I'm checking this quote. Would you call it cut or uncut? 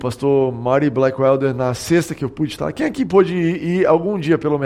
uncut